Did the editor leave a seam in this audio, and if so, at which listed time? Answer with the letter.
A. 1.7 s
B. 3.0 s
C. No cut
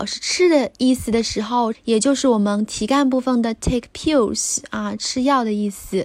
A